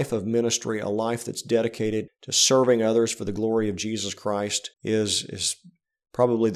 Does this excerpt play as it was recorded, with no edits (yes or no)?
no